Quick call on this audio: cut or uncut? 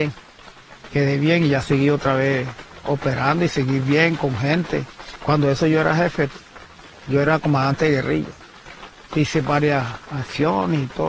uncut